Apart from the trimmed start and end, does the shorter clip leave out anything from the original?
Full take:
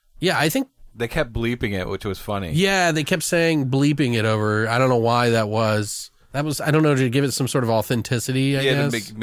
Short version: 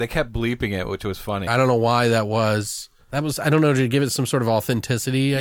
yes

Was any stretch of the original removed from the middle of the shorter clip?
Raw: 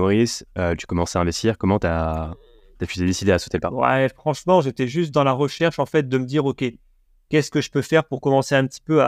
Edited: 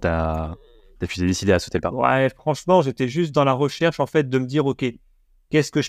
no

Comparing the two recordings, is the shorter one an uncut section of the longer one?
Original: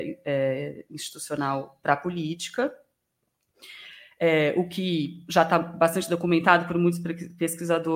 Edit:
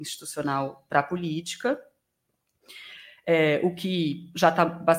yes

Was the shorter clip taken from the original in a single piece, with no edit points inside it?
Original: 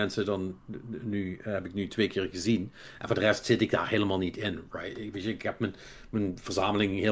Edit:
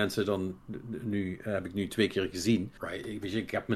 no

